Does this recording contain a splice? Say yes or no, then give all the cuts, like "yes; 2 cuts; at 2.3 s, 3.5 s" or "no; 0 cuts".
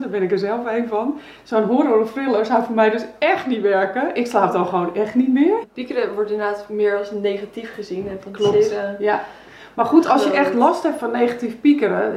yes; 1 cut; at 5.6 s